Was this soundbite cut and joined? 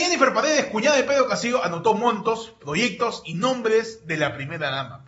no; 0 cuts

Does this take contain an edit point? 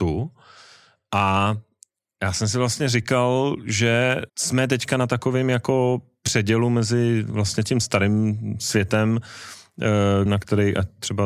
yes; 2 cuts; at 4.3 s, 10.3 s

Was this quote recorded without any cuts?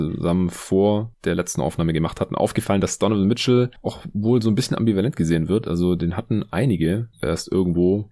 yes; 0 cuts

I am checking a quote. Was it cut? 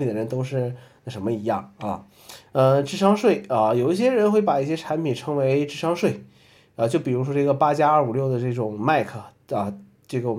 yes; 1 cut; at 2.5 s

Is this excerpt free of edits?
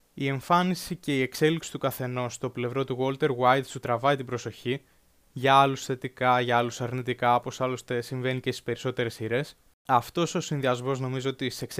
yes; 0 cuts

